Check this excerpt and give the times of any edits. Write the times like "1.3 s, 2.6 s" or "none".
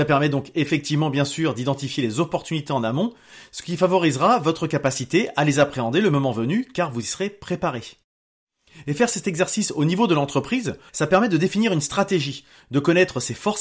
10.9 s